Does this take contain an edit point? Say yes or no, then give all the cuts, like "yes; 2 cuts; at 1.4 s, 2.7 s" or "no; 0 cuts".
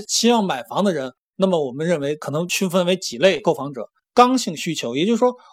no; 0 cuts